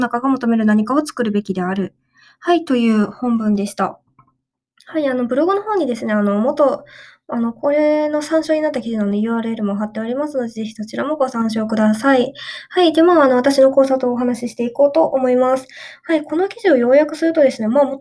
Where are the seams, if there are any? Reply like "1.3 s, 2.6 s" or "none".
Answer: none